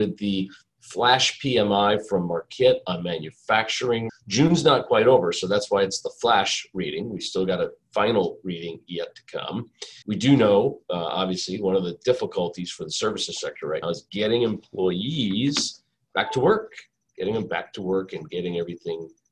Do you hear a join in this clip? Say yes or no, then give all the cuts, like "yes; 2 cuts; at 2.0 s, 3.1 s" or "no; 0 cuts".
yes; 3 cuts; at 4.1 s, 10.0 s, 13.8 s